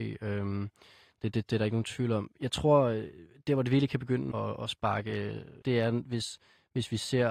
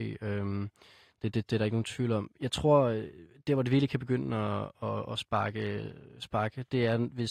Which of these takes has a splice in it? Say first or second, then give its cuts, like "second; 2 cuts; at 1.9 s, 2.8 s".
first; 2 cuts; at 4.3 s, 5.6 s